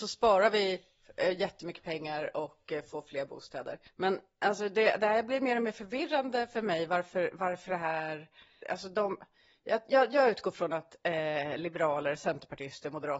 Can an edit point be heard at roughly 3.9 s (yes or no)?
yes